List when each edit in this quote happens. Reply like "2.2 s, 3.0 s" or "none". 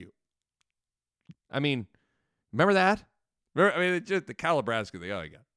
1.3 s, 3.4 s